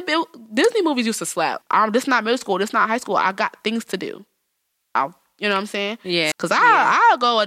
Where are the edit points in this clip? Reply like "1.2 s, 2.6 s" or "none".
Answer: 1.6 s, 6.3 s